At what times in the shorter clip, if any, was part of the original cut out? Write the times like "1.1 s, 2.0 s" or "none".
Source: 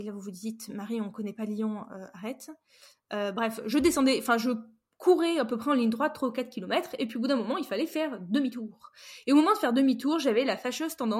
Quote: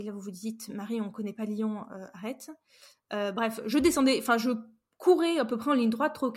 none